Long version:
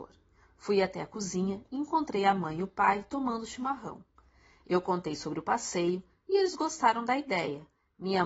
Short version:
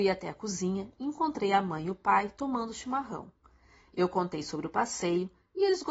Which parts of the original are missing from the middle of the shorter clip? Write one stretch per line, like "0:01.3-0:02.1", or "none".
none